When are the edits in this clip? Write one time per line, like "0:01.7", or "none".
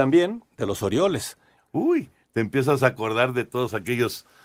0:01.6